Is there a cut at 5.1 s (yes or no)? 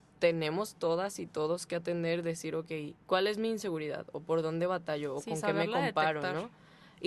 no